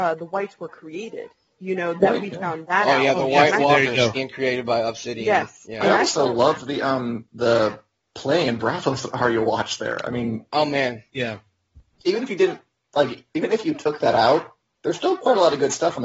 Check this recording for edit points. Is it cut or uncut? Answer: cut